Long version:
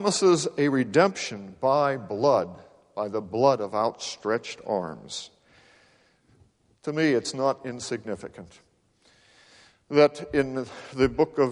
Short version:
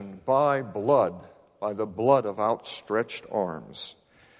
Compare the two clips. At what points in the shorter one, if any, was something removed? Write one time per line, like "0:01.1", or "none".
none